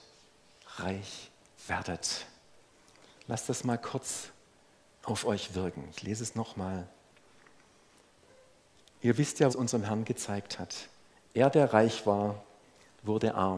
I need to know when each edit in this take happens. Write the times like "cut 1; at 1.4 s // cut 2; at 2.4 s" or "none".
cut 1; at 5.0 s // cut 2; at 9.5 s